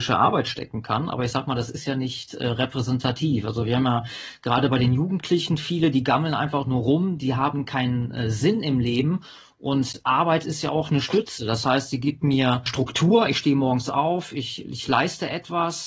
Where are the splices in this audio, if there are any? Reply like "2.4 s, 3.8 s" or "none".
none